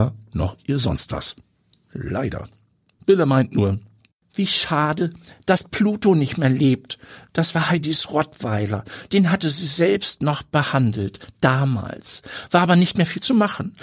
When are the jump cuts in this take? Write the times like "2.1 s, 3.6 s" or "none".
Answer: none